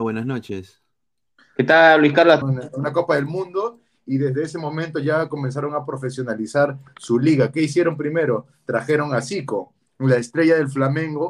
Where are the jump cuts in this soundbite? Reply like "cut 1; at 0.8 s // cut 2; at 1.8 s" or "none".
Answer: cut 1; at 2.4 s